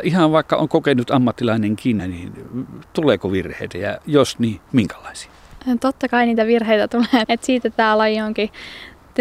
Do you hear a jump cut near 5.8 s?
no; 2 cuts; at 2.0 s, 7.2 s

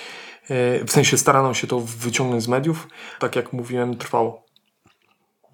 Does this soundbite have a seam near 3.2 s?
yes; 1 cut; at 3.2 s

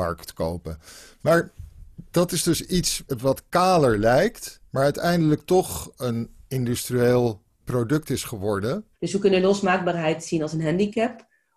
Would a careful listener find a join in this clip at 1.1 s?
no; 2 cuts; at 4.7 s, 8.9 s

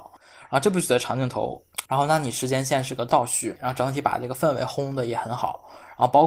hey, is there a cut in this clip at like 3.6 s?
yes; 2 cuts; at 1.9 s, 3.6 s

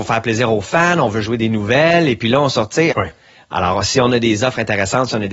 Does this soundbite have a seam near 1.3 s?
no; 1 cut; at 2.9 s

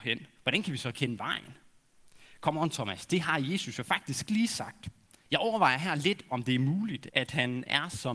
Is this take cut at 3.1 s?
no; 2 cuts; at 5.3 s, 7.1 s

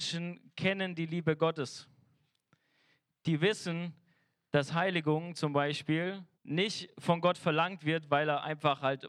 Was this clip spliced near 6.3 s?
yes; 1 cut; at 6.3 s

